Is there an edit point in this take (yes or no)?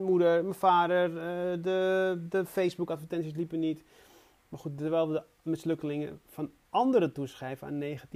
no